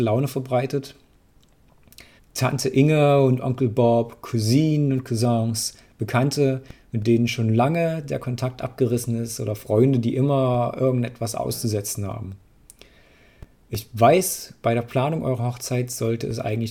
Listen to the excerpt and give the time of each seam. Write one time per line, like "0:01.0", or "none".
0:02.2